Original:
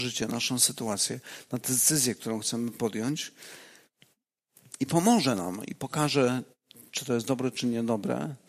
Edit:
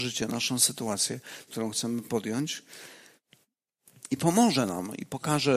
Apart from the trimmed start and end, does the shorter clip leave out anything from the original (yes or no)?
yes